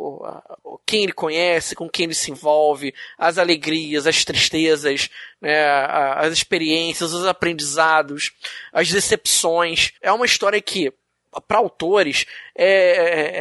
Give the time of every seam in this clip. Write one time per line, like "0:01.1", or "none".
0:10.0